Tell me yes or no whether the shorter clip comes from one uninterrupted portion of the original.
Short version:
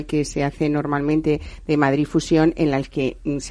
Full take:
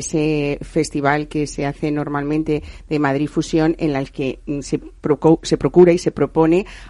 yes